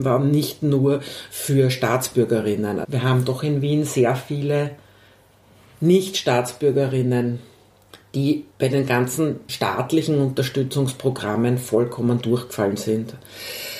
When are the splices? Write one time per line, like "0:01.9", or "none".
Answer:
0:02.8
0:08.5